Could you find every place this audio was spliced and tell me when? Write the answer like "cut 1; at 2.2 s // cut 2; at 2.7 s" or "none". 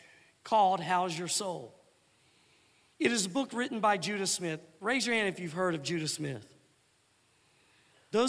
none